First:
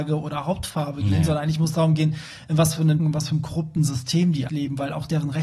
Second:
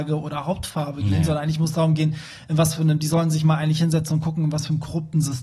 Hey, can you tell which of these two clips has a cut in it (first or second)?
first